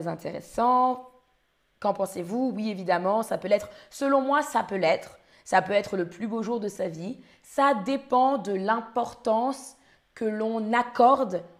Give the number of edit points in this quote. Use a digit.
0